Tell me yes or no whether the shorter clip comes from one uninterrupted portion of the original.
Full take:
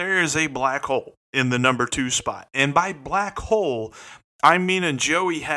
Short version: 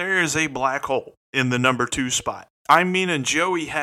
no